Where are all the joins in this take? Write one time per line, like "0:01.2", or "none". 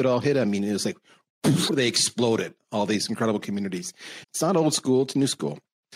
0:01.7
0:04.2